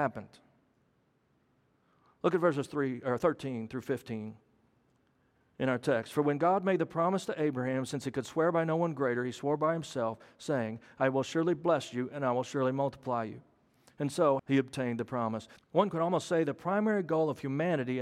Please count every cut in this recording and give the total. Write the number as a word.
two